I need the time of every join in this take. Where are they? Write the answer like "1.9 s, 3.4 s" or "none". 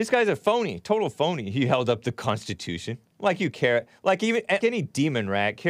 4.6 s